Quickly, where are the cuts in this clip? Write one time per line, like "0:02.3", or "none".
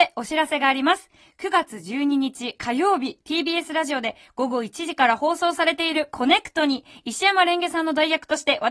none

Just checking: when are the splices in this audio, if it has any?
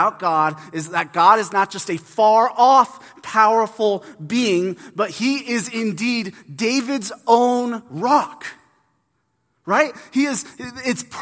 none

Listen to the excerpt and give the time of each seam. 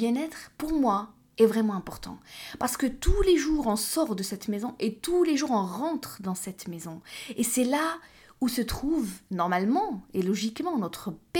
none

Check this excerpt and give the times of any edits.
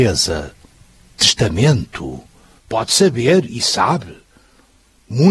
0:02.6

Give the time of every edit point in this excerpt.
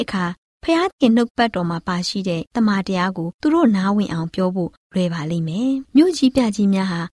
none

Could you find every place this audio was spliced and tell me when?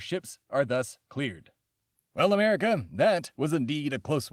0:01.9

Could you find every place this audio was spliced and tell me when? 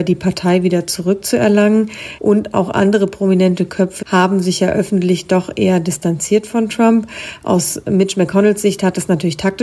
0:02.2
0:04.0

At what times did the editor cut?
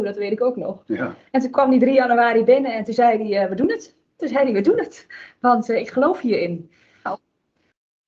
0:04.2
0:07.1

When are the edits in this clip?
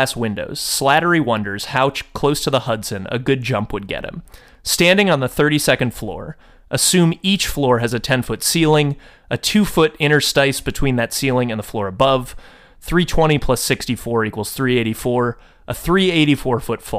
none

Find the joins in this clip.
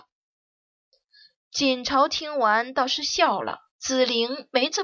0:03.7

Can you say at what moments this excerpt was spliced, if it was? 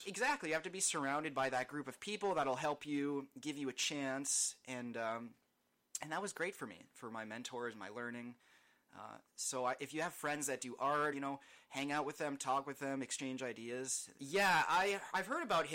0:11.1
0:14.2

